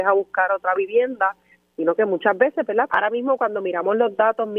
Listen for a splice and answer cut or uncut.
cut